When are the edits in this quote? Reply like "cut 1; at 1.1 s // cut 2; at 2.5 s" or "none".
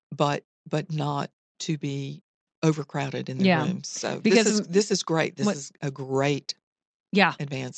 none